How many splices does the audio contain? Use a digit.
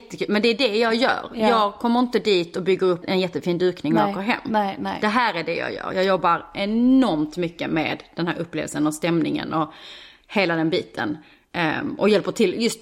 1